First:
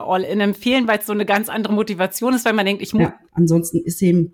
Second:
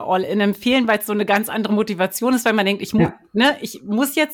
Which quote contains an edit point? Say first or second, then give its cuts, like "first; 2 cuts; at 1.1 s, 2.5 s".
first; 1 cut; at 3.3 s